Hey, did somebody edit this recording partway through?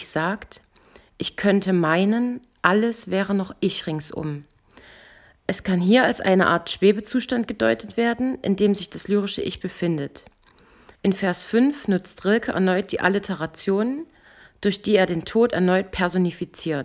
yes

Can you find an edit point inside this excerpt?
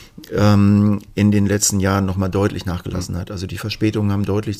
no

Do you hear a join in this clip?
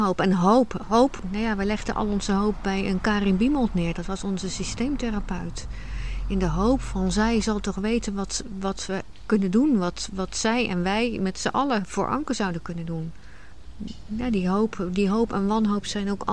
no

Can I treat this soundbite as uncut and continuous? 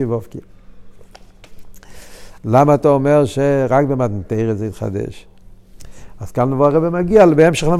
no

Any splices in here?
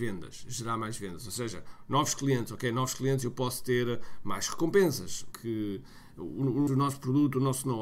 yes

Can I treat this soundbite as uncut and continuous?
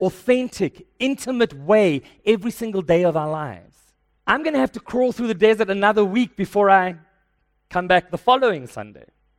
no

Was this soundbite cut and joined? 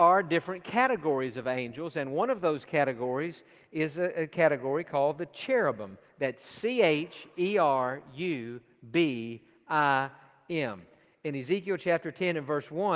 no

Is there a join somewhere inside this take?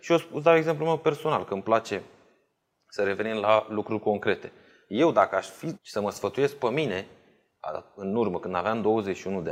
yes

